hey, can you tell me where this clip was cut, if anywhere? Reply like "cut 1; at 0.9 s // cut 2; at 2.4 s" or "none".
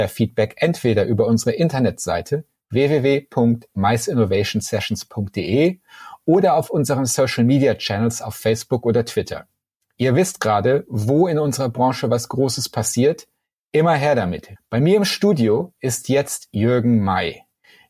cut 1; at 14.6 s